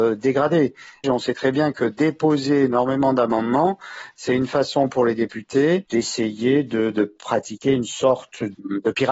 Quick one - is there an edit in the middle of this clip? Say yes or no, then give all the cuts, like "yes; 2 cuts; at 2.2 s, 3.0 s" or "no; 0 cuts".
yes; 1 cut; at 1.0 s